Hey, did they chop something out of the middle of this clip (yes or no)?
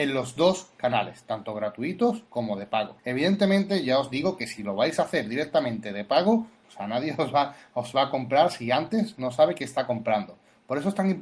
yes